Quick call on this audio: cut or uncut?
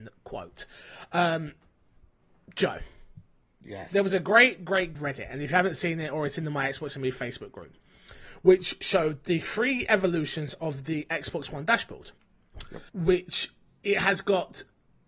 cut